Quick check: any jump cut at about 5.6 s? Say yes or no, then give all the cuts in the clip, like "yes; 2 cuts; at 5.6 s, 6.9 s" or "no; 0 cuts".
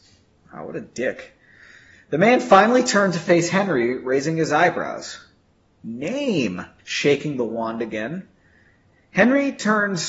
no; 1 cut; at 6.8 s